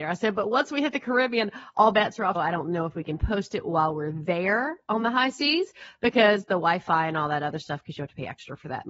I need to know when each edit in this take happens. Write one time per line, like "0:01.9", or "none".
0:02.3